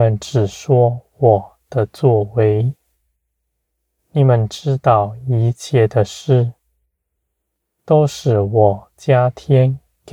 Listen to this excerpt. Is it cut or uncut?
uncut